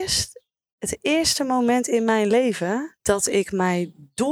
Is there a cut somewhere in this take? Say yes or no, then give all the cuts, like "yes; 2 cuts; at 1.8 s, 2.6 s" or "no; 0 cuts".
yes; 1 cut; at 3.0 s